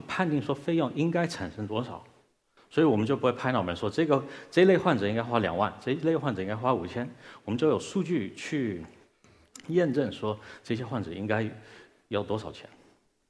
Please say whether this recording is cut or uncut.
uncut